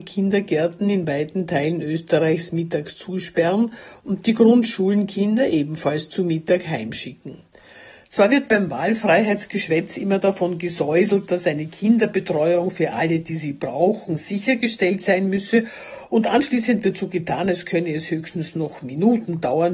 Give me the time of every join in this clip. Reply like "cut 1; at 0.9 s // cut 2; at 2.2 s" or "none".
none

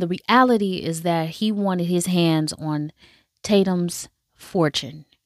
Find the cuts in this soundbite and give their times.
none

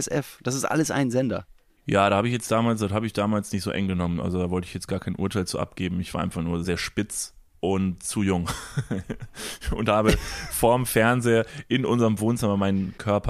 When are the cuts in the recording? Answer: cut 1; at 6.6 s

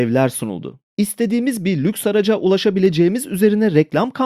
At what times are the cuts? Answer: none

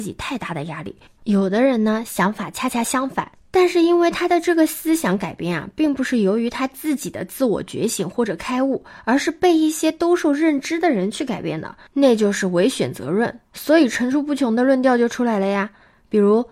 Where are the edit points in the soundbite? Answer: cut 1; at 1.2 s

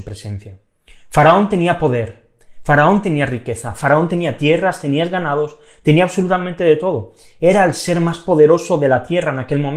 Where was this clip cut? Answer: none

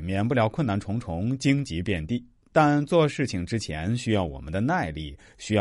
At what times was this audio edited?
none

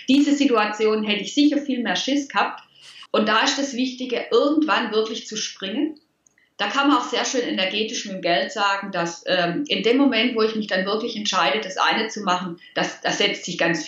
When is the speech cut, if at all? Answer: cut 1; at 3.1 s

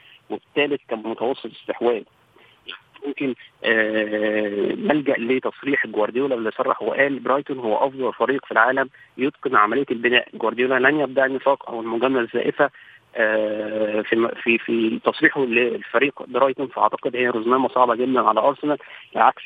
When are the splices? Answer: none

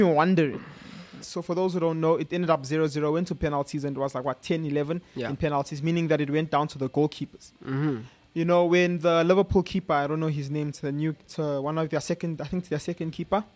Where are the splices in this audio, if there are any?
cut 1; at 1.2 s

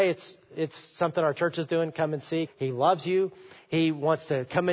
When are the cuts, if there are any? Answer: cut 1; at 2.5 s

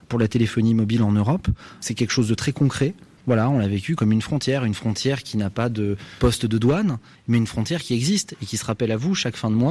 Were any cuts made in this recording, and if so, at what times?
cut 1; at 3.2 s

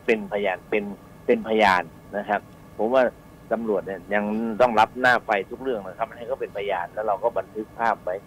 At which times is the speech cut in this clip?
none

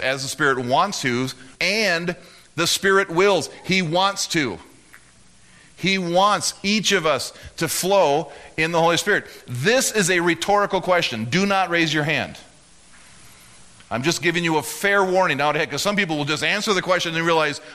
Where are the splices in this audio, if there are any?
cut 1; at 1.5 s

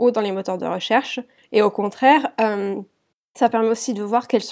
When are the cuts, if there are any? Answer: cut 1; at 1.4 s

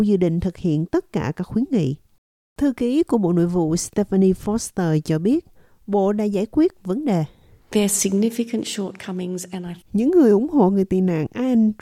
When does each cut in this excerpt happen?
cut 1; at 9.8 s

